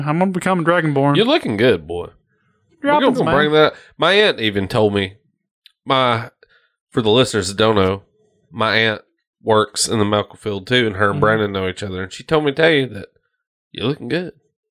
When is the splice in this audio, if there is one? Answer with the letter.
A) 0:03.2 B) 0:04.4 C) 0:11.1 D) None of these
A